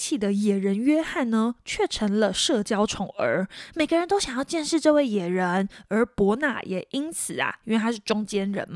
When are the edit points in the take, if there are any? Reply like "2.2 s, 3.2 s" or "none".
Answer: none